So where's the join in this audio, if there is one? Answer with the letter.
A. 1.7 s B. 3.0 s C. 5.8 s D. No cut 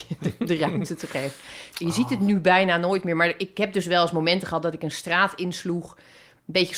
A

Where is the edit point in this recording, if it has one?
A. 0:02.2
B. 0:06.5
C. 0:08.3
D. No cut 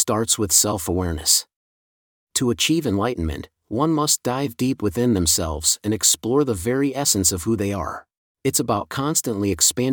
C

